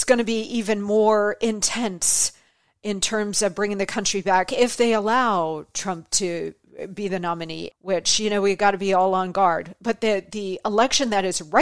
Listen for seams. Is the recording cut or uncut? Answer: cut